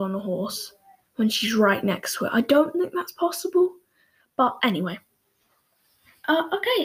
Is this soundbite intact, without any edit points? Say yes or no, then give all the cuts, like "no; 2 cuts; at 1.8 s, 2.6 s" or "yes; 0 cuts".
yes; 0 cuts